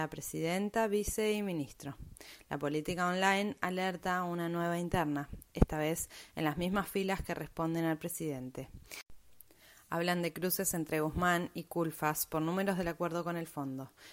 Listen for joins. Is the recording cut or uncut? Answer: uncut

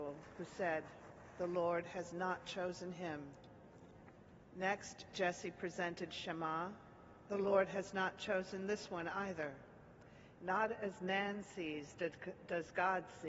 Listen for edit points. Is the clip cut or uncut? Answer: cut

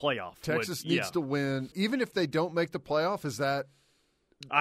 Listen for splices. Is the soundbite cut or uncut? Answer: cut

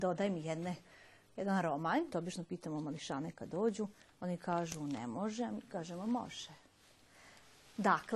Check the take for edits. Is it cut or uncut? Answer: cut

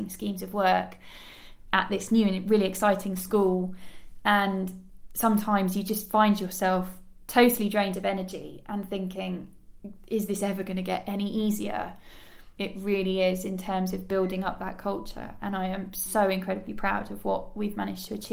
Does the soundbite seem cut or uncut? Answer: cut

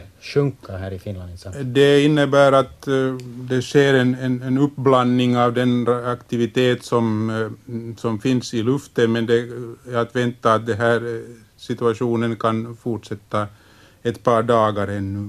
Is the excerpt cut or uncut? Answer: uncut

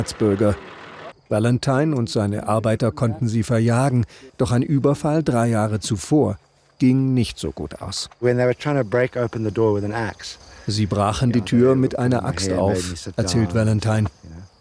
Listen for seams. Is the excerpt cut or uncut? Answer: cut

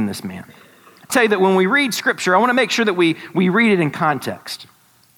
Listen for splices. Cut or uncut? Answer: cut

